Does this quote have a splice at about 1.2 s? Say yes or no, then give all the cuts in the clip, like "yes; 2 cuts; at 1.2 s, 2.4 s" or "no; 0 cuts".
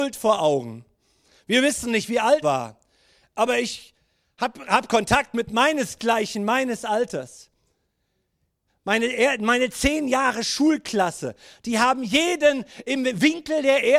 no; 2 cuts; at 2.4 s, 8.7 s